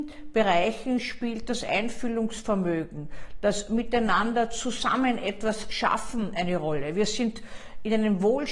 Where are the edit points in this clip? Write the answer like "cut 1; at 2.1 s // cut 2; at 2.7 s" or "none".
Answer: none